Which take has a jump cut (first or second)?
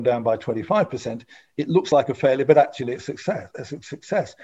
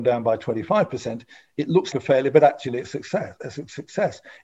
second